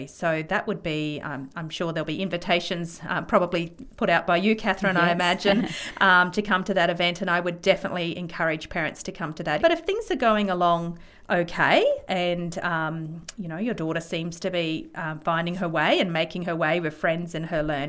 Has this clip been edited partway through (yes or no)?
yes